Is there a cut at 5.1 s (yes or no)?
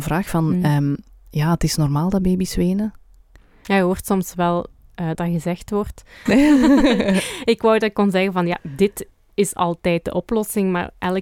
yes